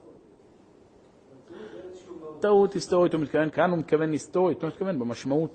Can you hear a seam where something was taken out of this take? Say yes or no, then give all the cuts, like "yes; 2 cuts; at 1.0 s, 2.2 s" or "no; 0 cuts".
yes; 2 cuts; at 3.5 s, 4.6 s